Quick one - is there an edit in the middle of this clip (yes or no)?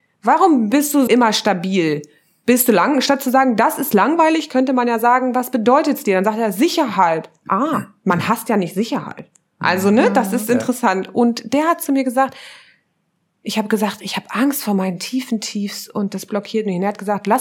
yes